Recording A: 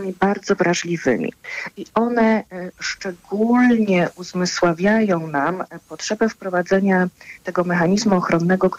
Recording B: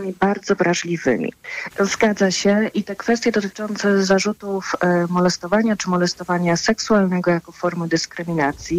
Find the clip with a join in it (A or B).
B